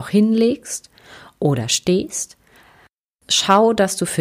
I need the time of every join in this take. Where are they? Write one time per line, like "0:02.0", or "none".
none